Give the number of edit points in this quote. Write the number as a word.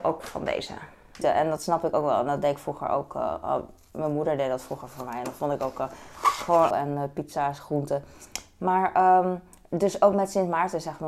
two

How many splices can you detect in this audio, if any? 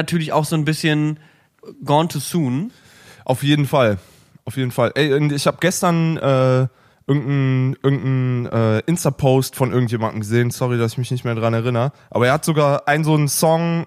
zero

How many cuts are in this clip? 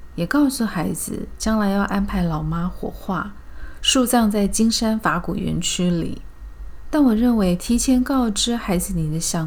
one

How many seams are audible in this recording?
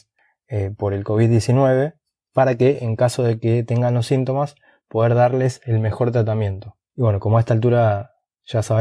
one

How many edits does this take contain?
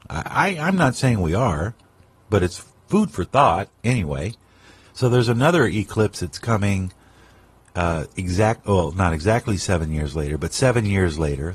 one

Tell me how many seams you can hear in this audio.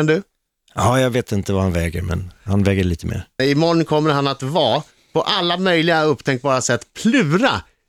one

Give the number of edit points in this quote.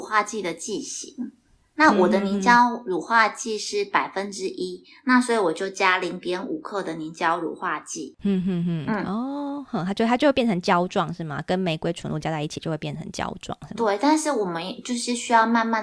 zero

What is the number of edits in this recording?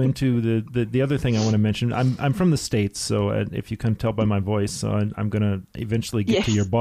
zero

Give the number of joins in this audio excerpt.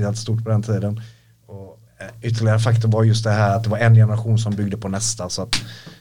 one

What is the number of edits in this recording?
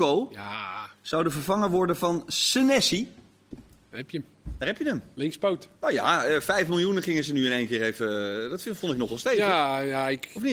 zero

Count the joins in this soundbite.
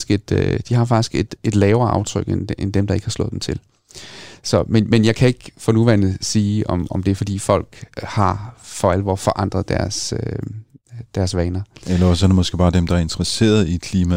zero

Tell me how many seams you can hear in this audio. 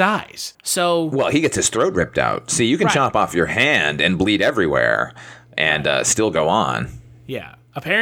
one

